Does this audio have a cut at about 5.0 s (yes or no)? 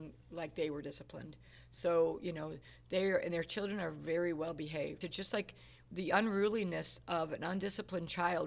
yes